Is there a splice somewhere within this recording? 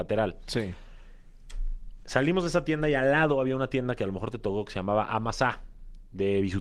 no; 0 cuts

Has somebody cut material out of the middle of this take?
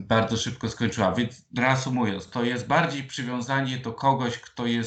no; 0 cuts

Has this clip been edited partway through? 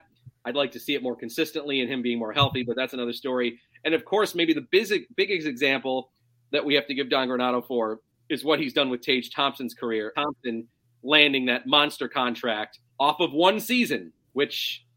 yes; 2 cuts; at 10.1 s, 12.9 s

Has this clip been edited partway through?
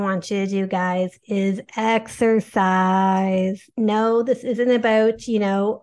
no; 0 cuts

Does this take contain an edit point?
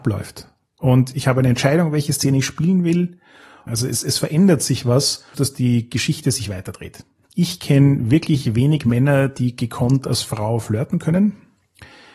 yes; 3 cuts; at 3.7 s, 5.3 s, 7.2 s

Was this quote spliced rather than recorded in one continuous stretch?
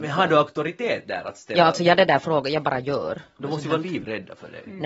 yes; 1 cut; at 3.4 s

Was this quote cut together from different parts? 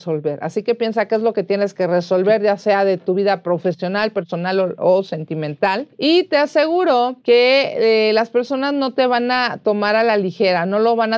no; 0 cuts

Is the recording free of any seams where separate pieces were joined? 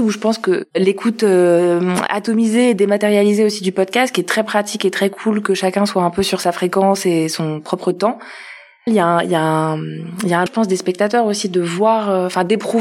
no; 2 cuts; at 8.9 s, 10.5 s

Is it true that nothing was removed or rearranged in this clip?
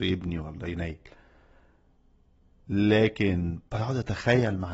yes; 0 cuts

